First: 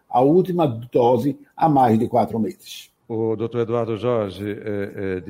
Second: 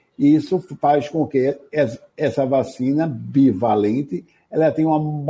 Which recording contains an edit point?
first; 1 cut; at 3.0 s

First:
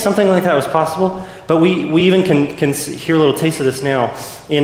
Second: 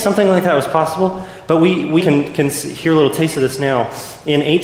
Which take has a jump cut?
second; 1 cut; at 2.0 s

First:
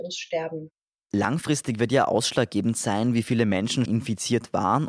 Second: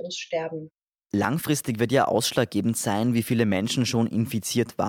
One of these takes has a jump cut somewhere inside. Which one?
first; 1 cut; at 3.8 s

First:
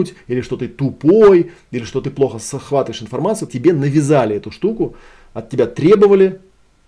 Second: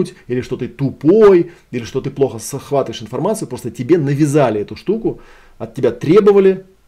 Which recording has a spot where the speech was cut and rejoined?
first; 1 cut; at 3.5 s

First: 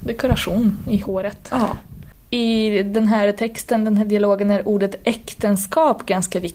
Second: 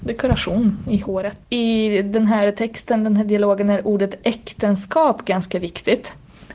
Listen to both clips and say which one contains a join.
second; 1 cut; at 1.4 s

